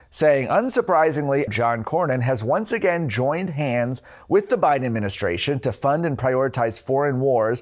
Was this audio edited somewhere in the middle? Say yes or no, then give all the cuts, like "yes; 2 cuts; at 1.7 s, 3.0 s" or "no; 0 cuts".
yes; 1 cut; at 1.5 s